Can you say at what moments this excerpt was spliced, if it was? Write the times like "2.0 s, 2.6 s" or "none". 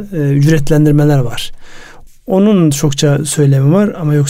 2.1 s

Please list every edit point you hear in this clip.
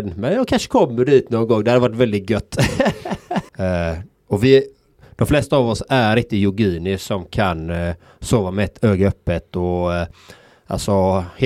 3.5 s

